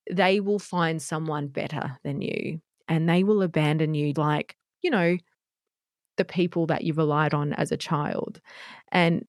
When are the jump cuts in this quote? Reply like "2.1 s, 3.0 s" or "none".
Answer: 4.1 s